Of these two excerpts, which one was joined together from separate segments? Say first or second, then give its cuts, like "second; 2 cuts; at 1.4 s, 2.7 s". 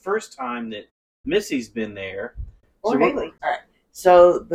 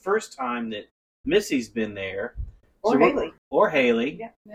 first; 1 cut; at 3.4 s